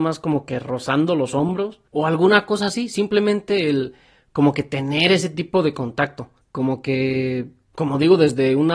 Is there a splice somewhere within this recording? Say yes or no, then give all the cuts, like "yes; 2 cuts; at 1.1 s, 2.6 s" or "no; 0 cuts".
no; 0 cuts